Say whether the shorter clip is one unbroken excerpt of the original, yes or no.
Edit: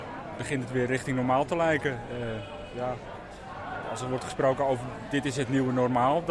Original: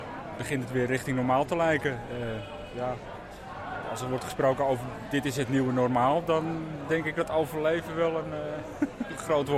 yes